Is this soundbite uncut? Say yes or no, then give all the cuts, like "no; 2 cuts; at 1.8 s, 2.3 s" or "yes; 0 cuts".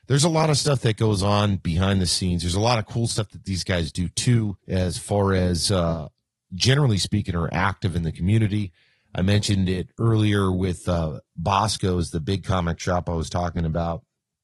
no; 1 cut; at 4.6 s